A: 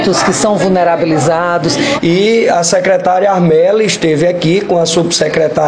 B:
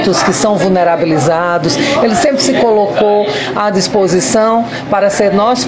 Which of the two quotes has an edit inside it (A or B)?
A